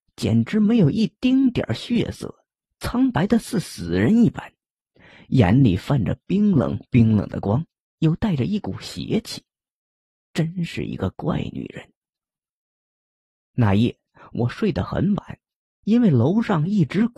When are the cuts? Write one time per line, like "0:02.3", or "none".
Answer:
none